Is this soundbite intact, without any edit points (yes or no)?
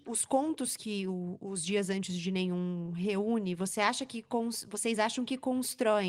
yes